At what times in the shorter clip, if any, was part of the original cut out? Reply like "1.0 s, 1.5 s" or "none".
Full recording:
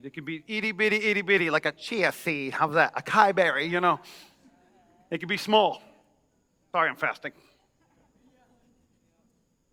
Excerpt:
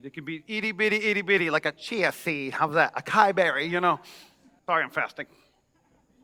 4.6 s